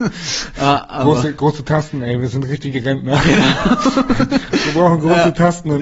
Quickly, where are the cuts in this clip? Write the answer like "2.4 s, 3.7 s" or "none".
none